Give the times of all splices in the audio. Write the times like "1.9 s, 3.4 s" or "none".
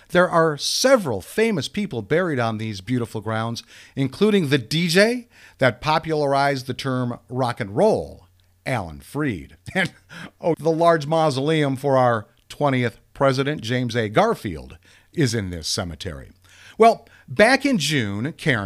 10.5 s

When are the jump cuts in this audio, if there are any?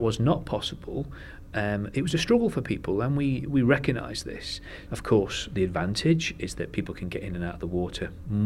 4.9 s

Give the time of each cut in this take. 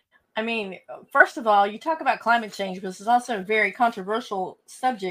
none

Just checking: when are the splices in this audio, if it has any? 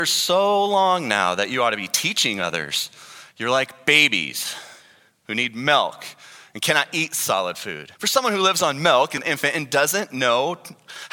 3.3 s, 8.0 s, 9.2 s

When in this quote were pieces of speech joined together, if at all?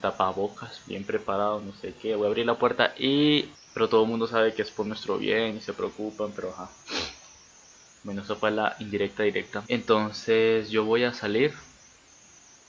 3.5 s, 9.6 s

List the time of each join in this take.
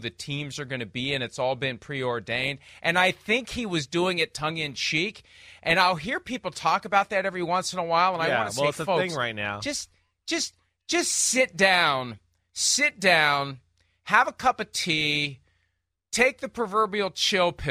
none

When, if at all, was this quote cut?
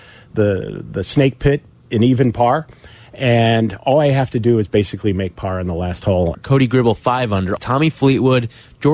6.3 s, 7.6 s

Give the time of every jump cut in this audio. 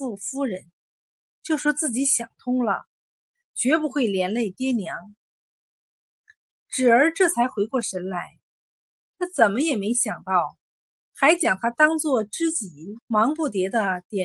11.0 s, 13.0 s

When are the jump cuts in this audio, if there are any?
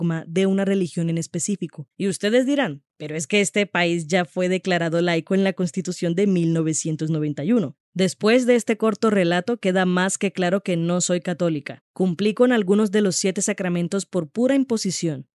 7.8 s

